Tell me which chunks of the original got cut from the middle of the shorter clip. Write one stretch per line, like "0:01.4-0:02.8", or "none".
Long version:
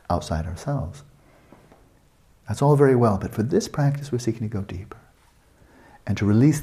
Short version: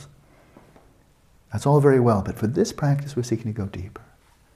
none